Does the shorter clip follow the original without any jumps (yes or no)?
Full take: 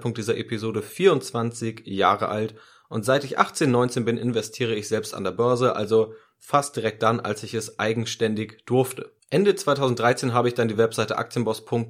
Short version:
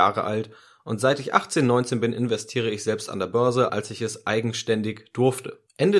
no